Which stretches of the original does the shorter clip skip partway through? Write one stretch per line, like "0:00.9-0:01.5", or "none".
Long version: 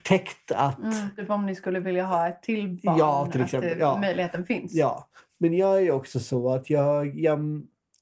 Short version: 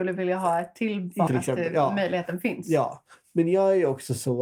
0:02.9-0:03.3